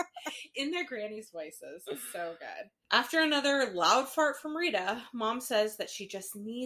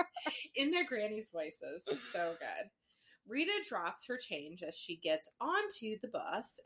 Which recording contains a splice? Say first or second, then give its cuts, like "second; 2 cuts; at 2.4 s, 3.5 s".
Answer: first; 1 cut; at 2.8 s